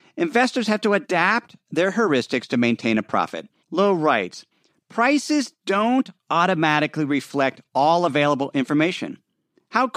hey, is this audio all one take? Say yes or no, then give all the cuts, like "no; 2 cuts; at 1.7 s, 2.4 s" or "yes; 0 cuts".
no; 1 cut; at 3.6 s